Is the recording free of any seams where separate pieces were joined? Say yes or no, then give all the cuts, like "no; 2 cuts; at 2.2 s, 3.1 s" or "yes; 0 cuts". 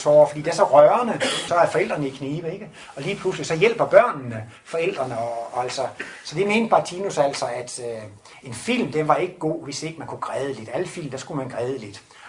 no; 1 cut; at 1.5 s